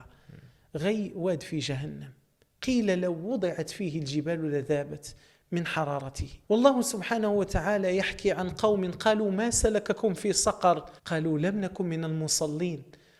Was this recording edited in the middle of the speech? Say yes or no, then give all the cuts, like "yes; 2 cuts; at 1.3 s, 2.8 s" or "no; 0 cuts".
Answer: yes; 2 cuts; at 6.4 s, 11.0 s